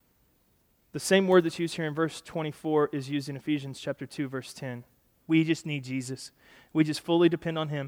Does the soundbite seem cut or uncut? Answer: cut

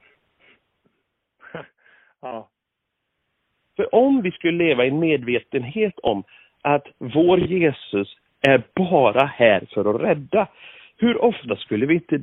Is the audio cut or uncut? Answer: uncut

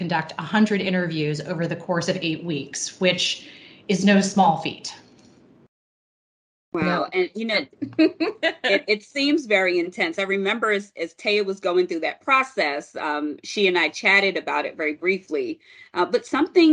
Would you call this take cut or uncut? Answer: cut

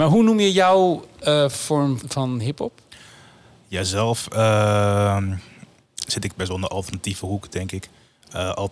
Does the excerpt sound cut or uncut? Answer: cut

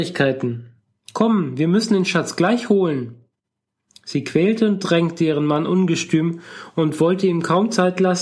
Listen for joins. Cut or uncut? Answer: cut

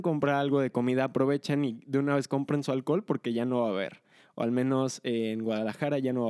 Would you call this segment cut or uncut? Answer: uncut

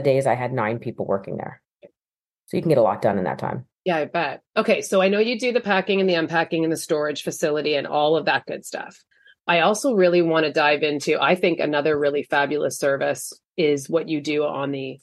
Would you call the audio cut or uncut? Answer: uncut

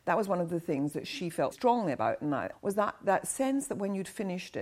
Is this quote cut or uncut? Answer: cut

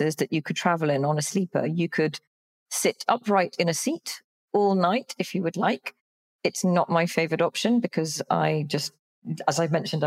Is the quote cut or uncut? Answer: uncut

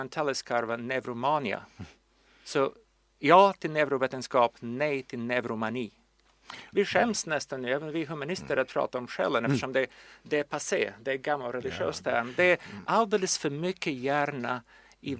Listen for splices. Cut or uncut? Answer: cut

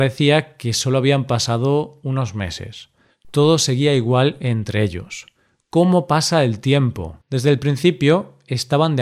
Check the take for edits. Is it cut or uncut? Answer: cut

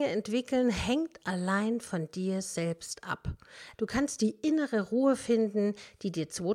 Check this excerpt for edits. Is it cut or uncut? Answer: cut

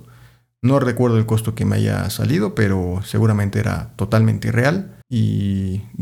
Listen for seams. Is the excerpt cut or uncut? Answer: cut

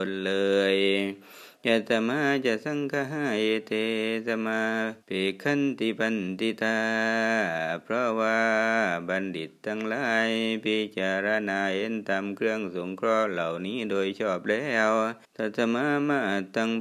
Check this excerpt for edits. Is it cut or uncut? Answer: cut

